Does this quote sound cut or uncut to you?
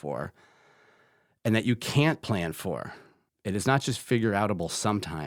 cut